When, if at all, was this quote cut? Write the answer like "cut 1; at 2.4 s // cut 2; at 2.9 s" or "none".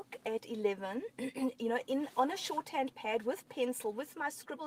none